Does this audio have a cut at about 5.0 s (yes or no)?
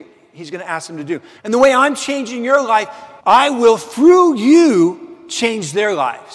no